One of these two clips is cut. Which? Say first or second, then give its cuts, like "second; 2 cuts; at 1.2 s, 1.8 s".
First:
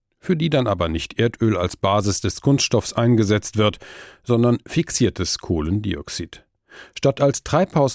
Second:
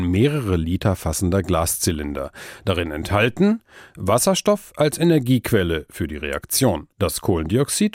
second; 1 cut; at 6.9 s